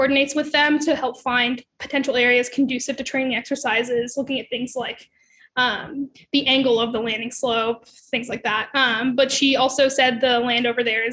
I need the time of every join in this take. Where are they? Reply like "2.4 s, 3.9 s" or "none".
none